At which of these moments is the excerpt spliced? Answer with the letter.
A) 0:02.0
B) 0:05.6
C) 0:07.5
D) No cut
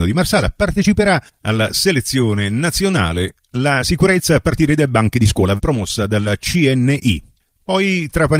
B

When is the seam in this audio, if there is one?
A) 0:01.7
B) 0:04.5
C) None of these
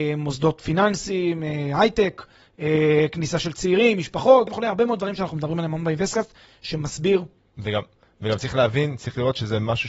B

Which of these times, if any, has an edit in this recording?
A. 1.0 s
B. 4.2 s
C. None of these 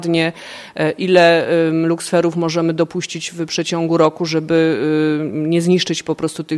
C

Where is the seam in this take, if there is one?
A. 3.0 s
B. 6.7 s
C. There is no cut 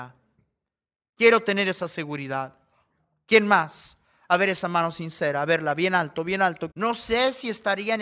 B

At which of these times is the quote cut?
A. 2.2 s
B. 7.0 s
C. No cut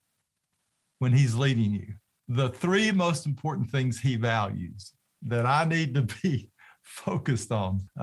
A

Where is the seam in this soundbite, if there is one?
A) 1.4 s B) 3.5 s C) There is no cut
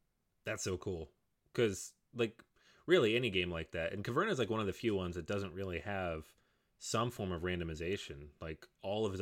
C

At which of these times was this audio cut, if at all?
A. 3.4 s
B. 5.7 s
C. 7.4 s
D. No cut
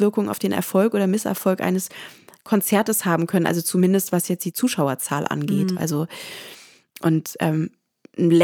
B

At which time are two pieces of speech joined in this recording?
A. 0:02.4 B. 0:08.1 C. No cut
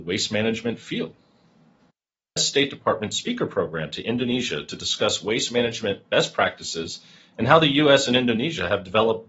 A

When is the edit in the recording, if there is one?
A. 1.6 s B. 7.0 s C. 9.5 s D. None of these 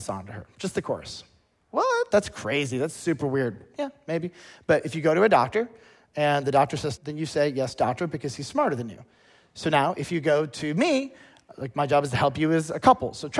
B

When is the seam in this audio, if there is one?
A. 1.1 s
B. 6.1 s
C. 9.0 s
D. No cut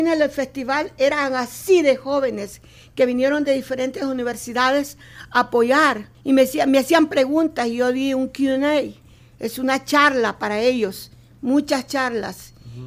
B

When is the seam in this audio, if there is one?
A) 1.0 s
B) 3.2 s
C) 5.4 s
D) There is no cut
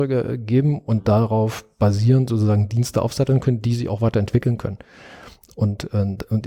D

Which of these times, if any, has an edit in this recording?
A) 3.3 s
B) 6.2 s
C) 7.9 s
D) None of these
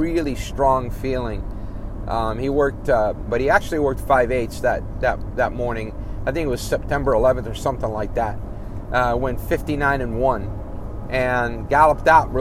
A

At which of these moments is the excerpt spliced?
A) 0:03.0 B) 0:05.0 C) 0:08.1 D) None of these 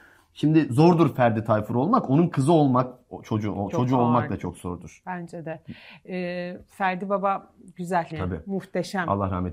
C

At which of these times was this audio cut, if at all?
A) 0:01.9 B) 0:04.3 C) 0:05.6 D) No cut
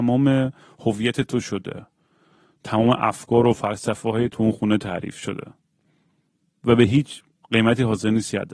B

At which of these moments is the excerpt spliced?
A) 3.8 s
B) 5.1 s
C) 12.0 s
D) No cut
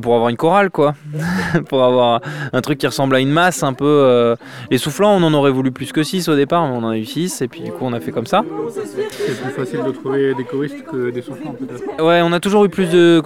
C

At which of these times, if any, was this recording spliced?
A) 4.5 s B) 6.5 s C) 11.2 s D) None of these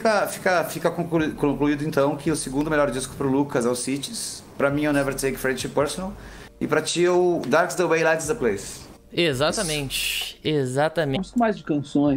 C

